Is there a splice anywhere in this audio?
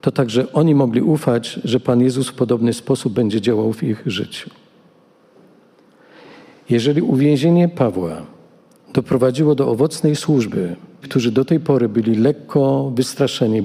yes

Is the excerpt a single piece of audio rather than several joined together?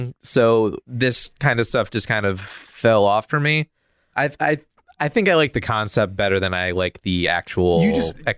no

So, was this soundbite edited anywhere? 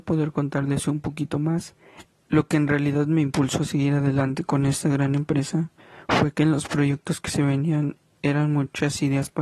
yes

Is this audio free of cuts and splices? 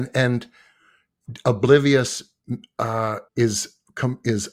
no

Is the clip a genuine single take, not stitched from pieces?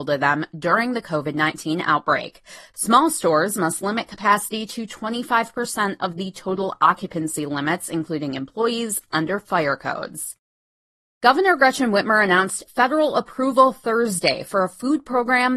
no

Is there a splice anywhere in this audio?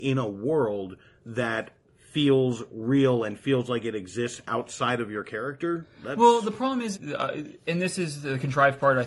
yes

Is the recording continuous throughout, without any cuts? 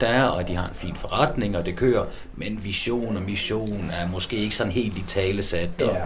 yes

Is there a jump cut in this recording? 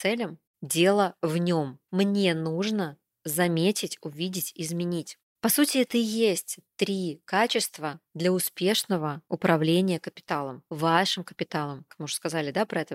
yes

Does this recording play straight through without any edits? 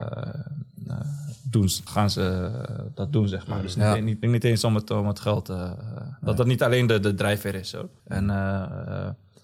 no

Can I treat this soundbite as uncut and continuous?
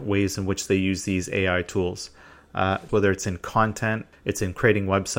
no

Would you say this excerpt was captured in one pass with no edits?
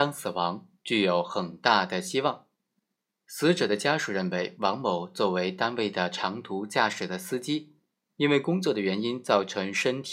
yes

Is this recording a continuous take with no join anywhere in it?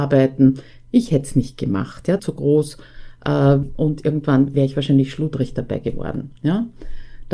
no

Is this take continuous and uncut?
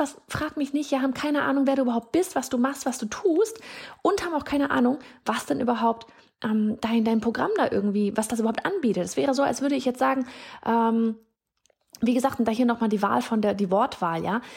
yes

